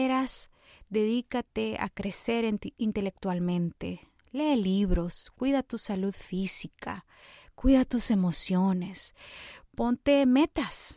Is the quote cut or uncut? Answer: uncut